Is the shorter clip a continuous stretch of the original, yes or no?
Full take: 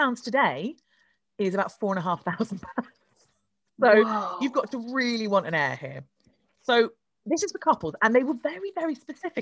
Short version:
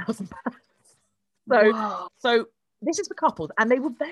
no